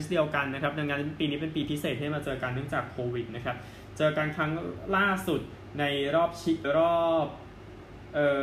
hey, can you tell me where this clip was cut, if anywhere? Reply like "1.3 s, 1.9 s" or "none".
6.6 s